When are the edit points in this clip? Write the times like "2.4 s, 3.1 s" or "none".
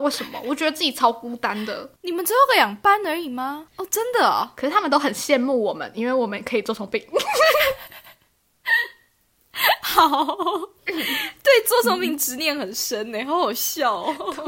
3.7 s